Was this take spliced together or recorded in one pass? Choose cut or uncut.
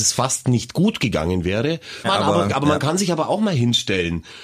cut